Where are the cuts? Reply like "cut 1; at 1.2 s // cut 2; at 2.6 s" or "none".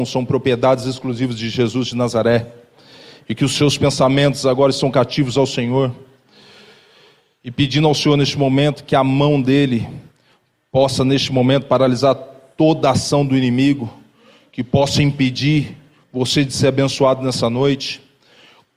none